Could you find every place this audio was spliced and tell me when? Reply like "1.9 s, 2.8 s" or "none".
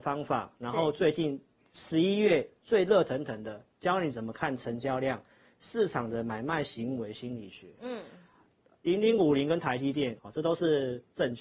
7.8 s, 10.2 s